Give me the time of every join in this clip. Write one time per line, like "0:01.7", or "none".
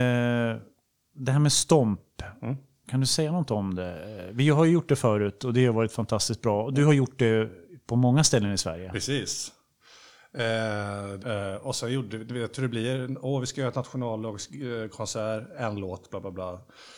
0:11.2

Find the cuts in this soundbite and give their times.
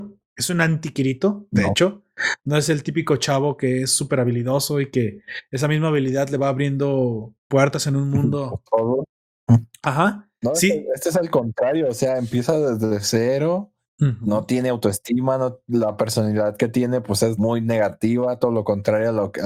none

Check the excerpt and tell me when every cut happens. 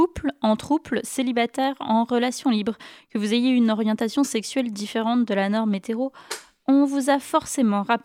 none

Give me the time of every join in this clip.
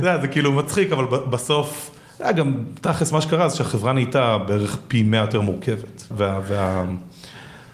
0:06.1

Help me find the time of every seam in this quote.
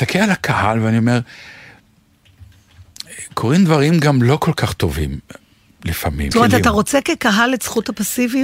0:06.3

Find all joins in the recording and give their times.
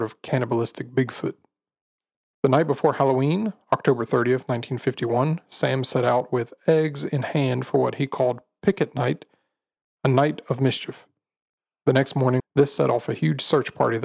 0:02.2
0:12.4

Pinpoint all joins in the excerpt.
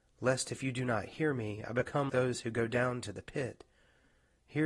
0:02.1

